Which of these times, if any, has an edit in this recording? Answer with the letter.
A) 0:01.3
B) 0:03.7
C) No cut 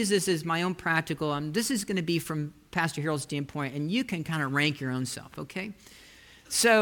C